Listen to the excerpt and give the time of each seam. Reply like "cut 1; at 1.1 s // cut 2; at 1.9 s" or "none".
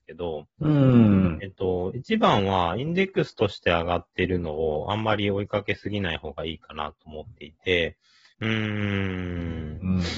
cut 1; at 8.3 s